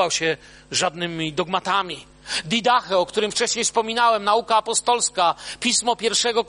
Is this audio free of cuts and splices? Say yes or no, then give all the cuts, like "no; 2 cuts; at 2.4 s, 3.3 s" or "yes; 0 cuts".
yes; 0 cuts